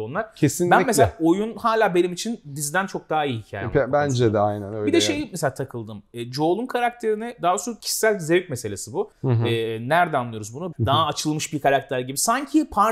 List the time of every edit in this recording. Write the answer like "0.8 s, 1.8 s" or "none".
9.1 s, 10.7 s